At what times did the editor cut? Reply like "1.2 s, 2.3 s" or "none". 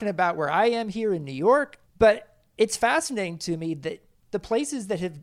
1.8 s